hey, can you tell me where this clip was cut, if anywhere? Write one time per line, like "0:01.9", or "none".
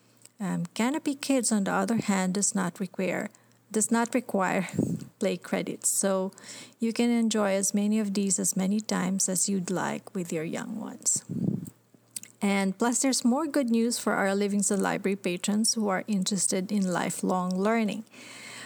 none